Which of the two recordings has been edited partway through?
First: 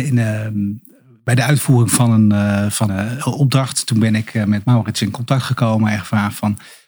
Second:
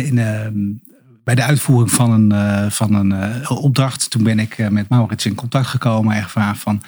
first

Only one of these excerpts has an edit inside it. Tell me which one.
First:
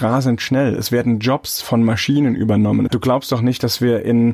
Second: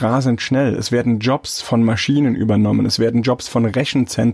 first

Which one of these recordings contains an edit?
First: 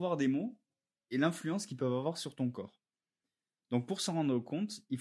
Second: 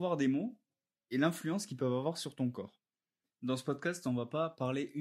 second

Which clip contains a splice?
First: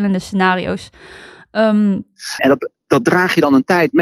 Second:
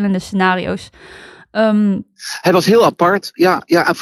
first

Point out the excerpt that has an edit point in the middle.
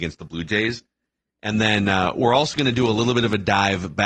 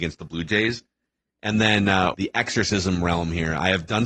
second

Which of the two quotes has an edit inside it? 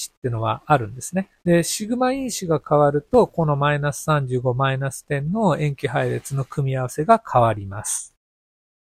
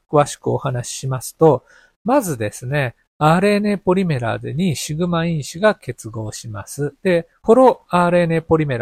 first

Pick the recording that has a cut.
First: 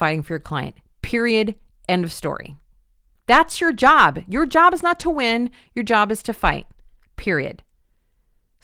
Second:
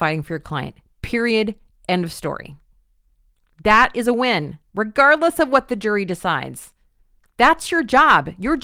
first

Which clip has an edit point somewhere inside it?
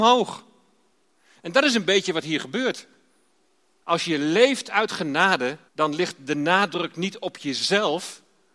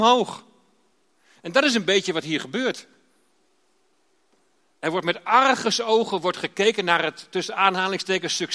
first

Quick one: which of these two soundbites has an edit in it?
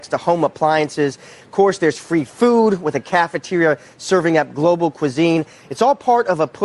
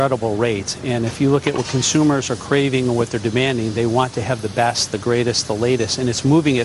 first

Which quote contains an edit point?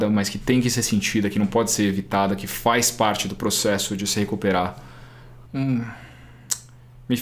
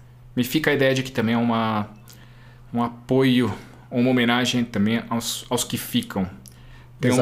first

